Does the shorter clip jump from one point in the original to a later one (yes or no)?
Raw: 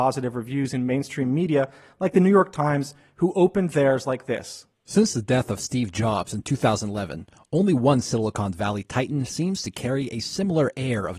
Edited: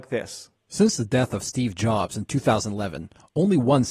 no